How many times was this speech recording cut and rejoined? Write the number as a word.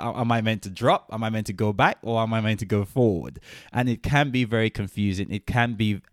zero